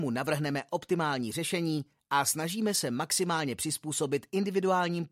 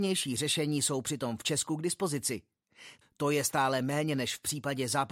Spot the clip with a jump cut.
second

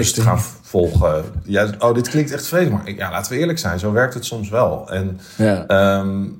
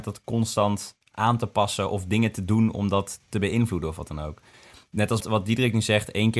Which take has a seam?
second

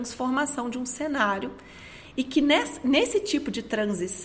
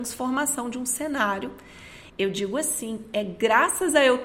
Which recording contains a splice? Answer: second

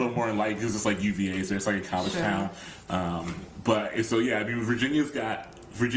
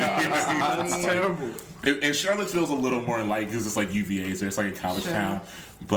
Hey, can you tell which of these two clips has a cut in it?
first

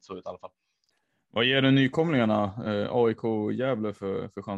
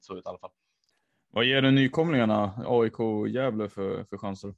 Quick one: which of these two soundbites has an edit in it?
second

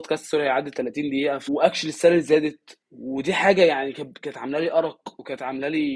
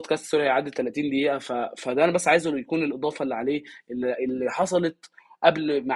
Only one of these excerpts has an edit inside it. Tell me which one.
first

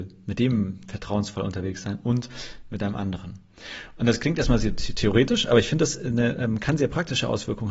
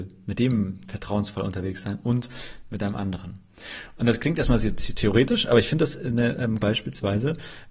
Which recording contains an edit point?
second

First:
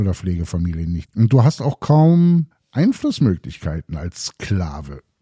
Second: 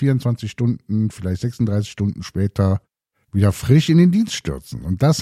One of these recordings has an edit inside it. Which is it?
first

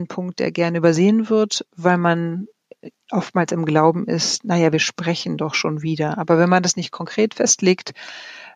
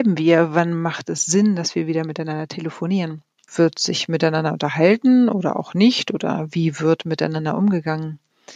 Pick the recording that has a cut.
second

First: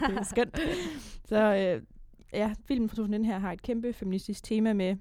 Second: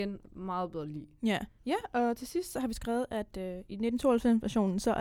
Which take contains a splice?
second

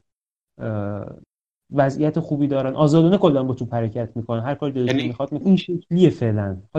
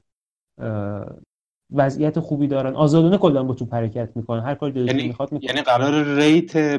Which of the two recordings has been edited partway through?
first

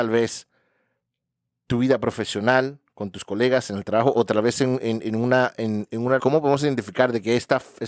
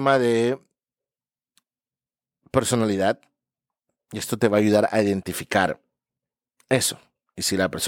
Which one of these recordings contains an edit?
first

